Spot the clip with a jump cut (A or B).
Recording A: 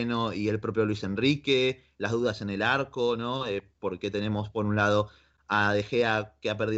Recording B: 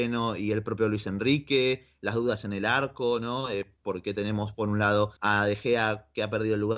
B